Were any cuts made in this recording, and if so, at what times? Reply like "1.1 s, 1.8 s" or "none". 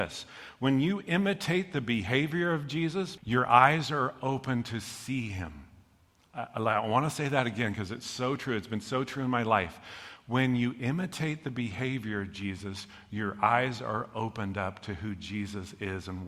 3.2 s

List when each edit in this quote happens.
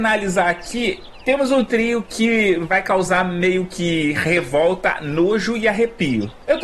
none

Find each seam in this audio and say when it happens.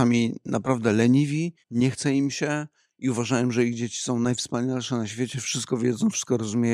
1.6 s

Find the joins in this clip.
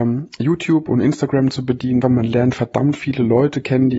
2.0 s

